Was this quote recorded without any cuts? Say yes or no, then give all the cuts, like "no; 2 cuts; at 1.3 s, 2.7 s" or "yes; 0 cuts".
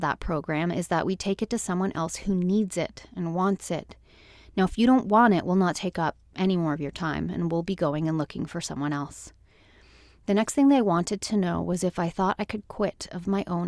yes; 0 cuts